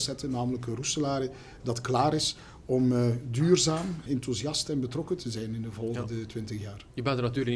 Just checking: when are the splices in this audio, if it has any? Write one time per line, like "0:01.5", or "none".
0:04.1